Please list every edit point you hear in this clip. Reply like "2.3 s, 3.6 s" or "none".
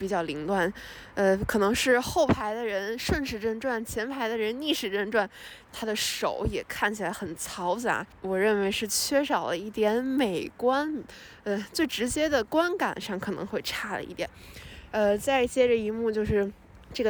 none